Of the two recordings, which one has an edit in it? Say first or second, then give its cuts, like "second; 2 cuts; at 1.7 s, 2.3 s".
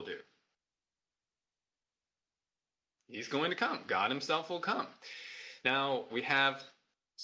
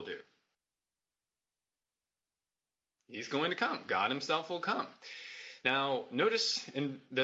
first; 1 cut; at 6.1 s